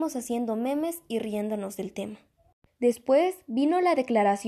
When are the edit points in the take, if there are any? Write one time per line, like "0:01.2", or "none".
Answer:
0:02.7